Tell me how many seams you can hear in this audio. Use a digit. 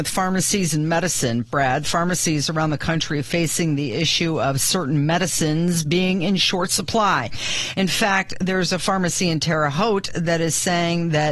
0